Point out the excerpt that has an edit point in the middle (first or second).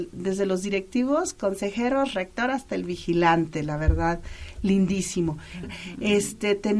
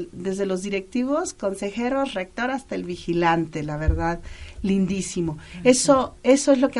first